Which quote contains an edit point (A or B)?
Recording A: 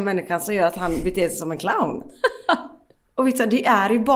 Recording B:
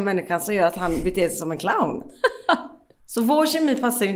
B